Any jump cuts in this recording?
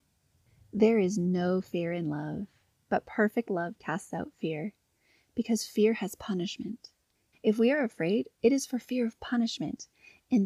yes; 1 cut; at 7.3 s

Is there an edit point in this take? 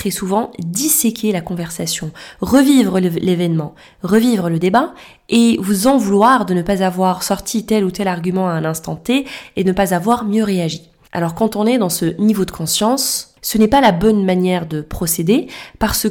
no; 0 cuts

